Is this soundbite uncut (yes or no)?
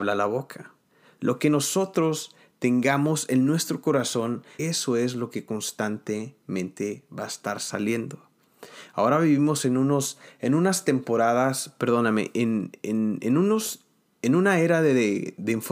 no